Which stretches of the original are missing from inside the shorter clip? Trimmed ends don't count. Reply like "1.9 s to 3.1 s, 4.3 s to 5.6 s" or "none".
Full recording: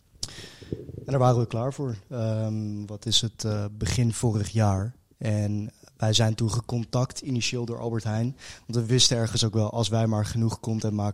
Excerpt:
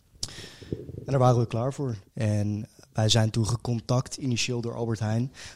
2.0 s to 5.1 s